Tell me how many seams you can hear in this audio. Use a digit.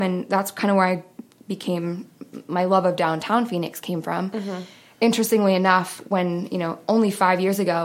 0